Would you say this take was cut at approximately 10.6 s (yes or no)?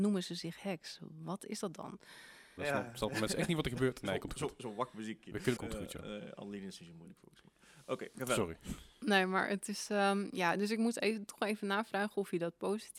no